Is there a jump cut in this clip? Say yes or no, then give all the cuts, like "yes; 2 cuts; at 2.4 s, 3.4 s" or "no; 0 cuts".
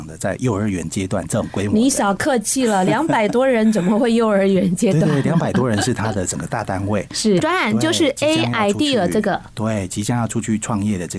yes; 1 cut; at 7.4 s